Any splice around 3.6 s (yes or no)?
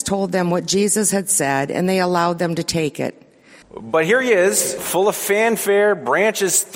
yes